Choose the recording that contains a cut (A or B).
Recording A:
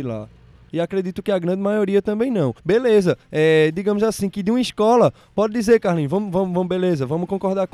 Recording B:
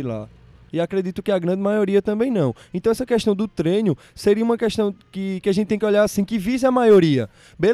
A